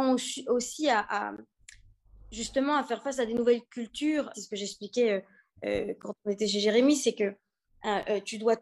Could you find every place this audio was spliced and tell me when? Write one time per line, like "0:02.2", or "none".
0:04.3